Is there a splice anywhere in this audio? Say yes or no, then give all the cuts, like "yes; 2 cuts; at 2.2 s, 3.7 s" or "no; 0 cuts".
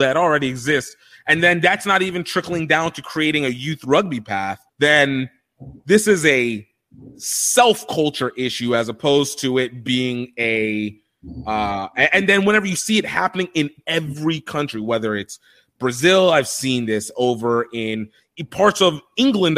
yes; 1 cut; at 4.7 s